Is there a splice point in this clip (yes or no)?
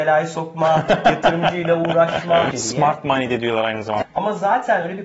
yes